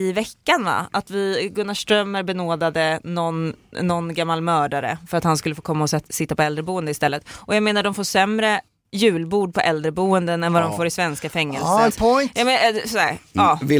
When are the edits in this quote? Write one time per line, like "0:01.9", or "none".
0:11.9